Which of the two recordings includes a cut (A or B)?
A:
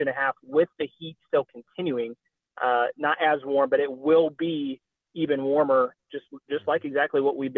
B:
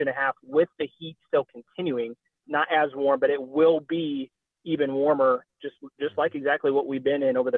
B